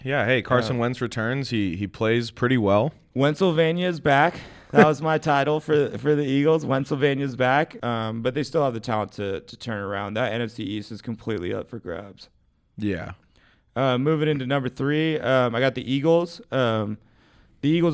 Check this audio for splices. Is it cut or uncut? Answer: cut